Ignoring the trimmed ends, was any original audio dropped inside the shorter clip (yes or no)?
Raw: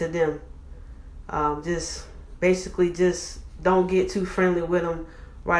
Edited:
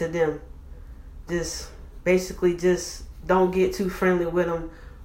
yes